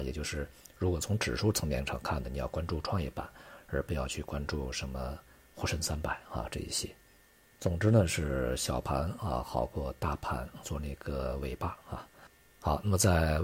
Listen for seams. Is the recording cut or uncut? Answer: cut